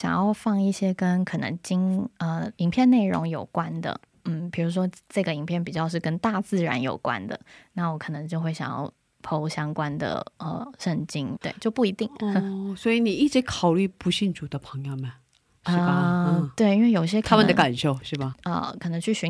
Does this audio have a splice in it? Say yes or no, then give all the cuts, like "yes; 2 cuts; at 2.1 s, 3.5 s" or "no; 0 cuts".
yes; 2 cuts; at 11.4 s, 18.3 s